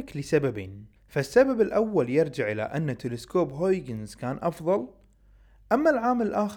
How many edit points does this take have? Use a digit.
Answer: 1